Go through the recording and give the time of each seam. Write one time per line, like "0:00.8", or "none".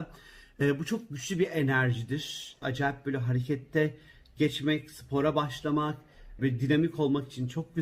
0:02.6
0:06.4